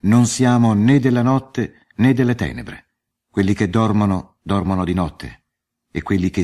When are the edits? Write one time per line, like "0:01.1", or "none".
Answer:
0:03.1